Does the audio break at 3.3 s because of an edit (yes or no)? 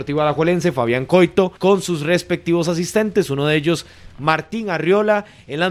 no